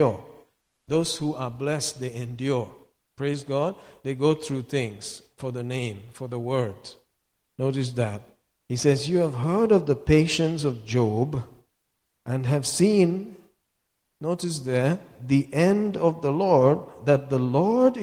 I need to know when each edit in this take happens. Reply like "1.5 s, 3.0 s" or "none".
none